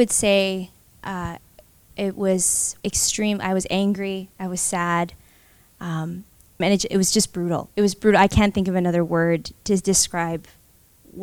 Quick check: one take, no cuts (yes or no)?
no